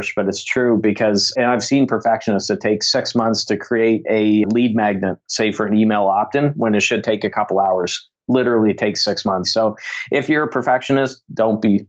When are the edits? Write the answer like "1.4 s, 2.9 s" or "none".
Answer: 9.4 s